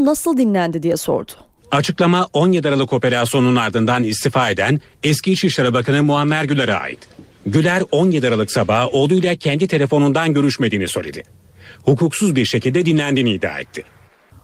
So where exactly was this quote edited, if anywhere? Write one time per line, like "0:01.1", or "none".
0:01.6